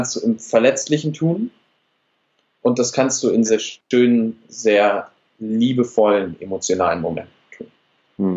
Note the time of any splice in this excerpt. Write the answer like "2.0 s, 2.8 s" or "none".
3.5 s